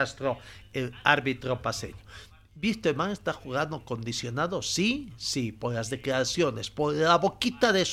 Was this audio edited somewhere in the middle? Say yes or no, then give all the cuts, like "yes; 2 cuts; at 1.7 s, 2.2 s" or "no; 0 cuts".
no; 0 cuts